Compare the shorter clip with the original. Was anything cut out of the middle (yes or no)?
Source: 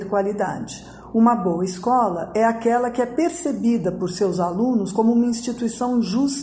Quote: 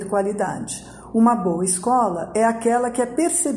no